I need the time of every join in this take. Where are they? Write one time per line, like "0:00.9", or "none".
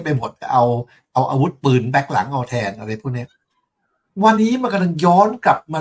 0:04.4